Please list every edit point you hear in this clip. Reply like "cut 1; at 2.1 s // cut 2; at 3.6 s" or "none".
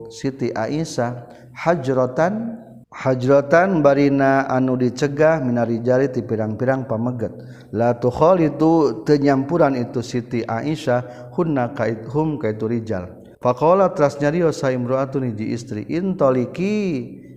cut 1; at 2.8 s // cut 2; at 13.3 s